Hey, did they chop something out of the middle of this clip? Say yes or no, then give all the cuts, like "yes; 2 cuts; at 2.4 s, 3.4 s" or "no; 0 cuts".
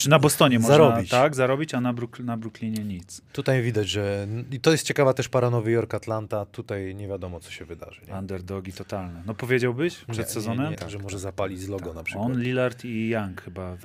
yes; 1 cut; at 10.7 s